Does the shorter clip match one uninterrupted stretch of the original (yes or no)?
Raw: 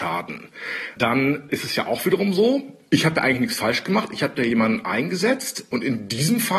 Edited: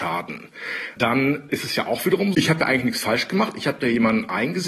no